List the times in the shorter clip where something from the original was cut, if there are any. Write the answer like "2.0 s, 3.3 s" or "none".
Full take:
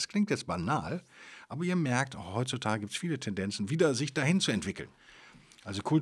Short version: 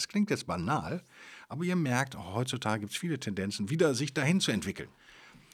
none